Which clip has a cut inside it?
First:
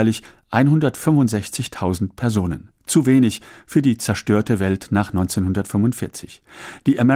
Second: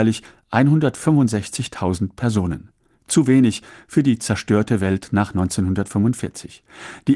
first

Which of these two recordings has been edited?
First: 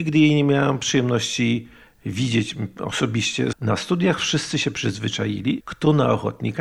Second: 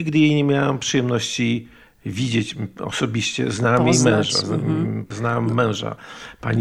first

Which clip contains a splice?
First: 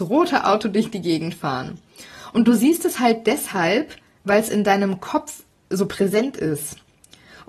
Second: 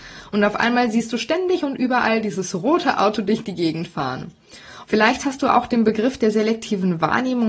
second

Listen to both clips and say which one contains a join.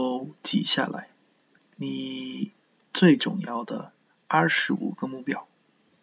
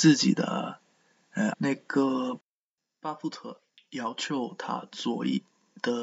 second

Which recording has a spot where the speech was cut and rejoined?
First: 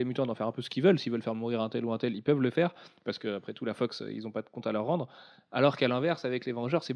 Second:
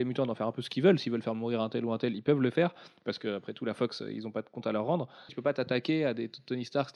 second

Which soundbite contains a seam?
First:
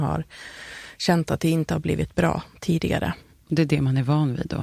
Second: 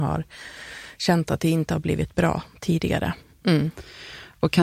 second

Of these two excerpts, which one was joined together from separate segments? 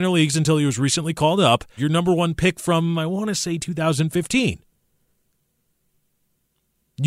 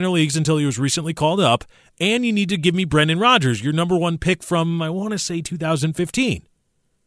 first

